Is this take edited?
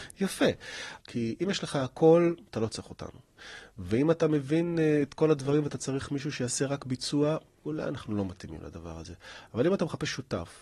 yes; 1 cut; at 1.0 s

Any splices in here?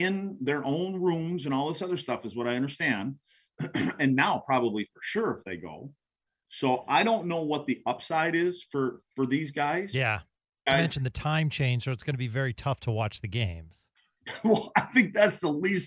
yes; 1 cut; at 10.7 s

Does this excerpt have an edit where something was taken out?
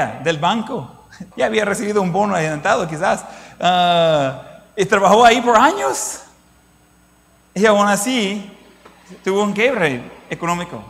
yes; 1 cut; at 1.3 s

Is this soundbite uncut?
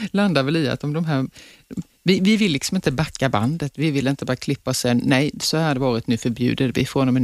yes; 0 cuts

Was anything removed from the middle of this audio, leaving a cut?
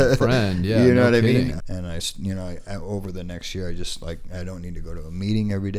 yes; 1 cut; at 1.6 s

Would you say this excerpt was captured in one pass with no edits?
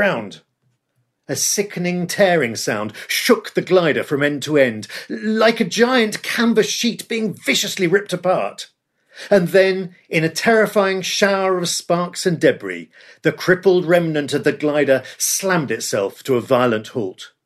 yes; 0 cuts

